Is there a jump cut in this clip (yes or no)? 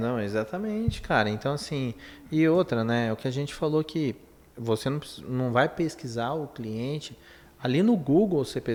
no